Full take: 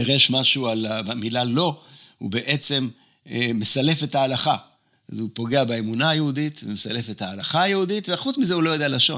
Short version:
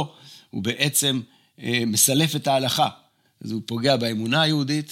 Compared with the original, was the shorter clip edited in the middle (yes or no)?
no